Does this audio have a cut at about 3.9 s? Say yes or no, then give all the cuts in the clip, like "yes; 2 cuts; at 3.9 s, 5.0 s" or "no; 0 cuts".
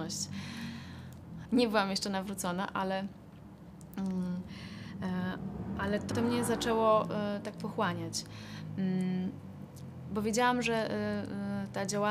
no; 2 cuts; at 1.4 s, 6.1 s